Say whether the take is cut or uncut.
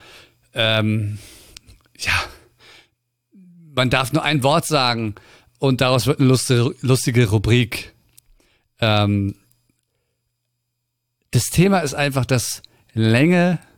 uncut